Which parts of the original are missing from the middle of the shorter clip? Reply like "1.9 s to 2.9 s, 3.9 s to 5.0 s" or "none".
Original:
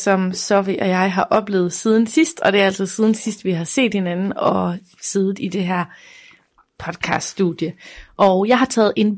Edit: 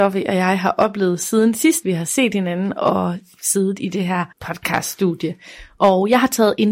2.3 s to 3.4 s, 5.9 s to 6.7 s